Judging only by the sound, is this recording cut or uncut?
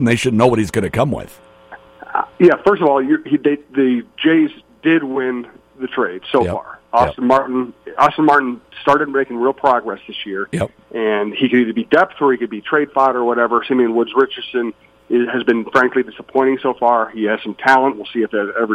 uncut